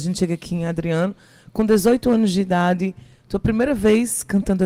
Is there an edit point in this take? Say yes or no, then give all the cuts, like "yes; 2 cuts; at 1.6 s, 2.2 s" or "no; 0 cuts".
no; 0 cuts